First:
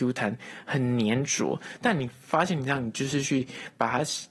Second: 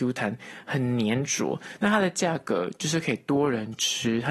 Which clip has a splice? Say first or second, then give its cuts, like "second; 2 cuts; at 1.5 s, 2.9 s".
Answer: second; 1 cut; at 1.8 s